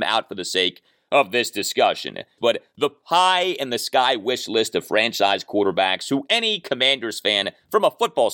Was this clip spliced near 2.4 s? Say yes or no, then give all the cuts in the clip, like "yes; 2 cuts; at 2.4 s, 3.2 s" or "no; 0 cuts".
yes; 1 cut; at 2.4 s